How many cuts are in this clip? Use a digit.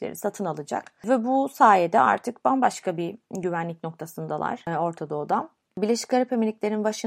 0